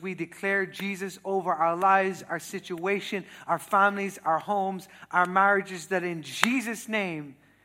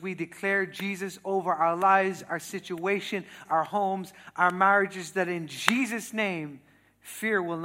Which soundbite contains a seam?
second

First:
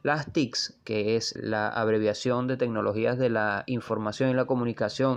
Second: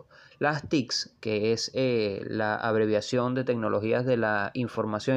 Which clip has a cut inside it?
first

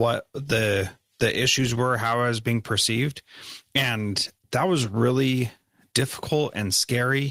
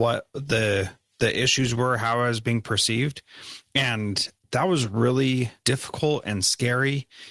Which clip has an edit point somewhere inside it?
second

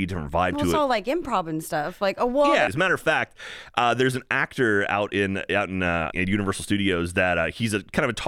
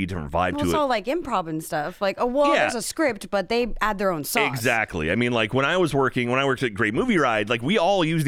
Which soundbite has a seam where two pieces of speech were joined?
first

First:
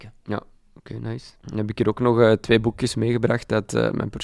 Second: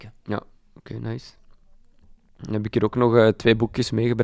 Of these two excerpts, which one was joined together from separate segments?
first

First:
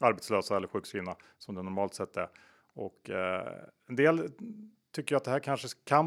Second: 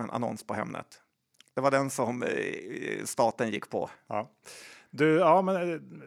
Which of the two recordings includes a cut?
second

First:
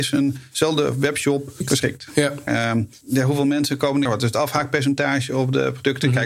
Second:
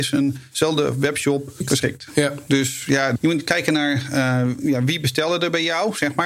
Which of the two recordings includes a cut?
first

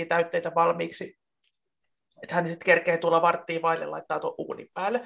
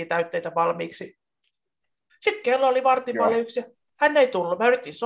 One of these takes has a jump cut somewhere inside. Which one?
second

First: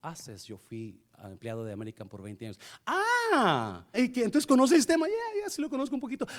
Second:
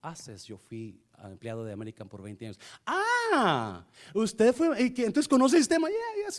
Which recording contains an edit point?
first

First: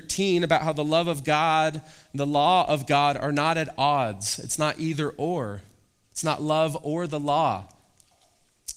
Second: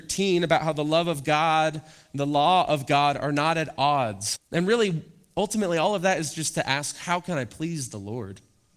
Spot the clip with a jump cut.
second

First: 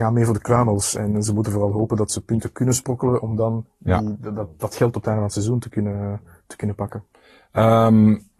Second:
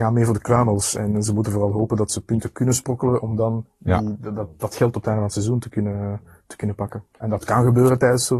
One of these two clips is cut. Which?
second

